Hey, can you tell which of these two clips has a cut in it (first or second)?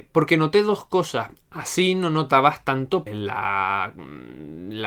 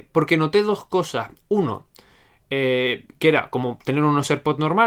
first